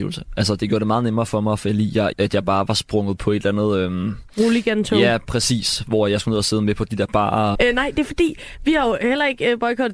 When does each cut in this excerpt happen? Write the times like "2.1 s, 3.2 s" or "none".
2.1 s, 7.5 s